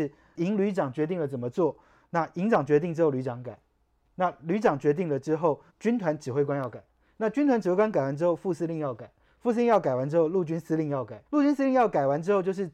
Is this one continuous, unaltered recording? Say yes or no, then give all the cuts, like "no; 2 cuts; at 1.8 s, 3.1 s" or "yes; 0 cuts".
no; 2 cuts; at 5.7 s, 11.2 s